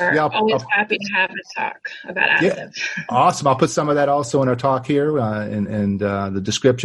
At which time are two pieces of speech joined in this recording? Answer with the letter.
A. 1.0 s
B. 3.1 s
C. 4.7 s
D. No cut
D